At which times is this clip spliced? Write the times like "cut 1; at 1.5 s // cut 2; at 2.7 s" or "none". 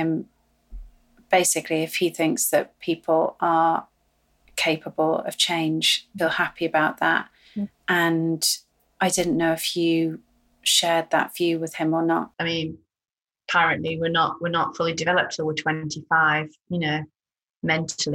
cut 1; at 6.2 s // cut 2; at 12.3 s